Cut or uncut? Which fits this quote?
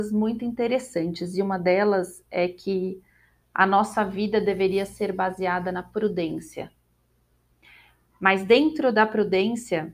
uncut